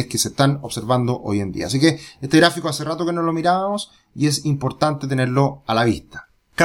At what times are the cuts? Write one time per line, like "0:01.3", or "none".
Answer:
none